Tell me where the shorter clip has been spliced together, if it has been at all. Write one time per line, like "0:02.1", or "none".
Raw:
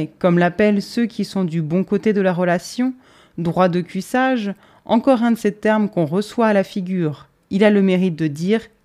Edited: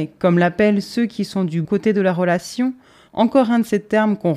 0:01.6
0:03.1